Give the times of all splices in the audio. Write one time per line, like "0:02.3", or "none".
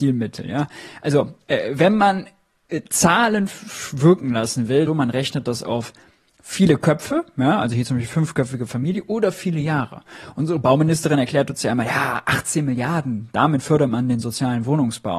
0:04.9